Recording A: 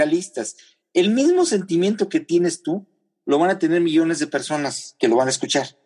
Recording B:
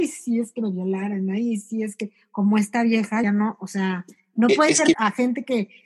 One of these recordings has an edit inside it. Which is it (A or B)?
B